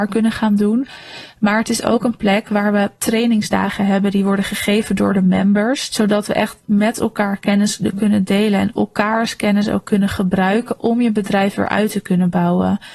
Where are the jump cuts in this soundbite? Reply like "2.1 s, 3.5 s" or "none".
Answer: 5.9 s